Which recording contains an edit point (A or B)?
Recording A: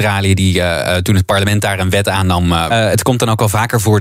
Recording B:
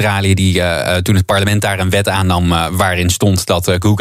A